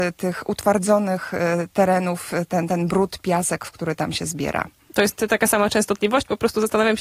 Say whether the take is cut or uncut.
uncut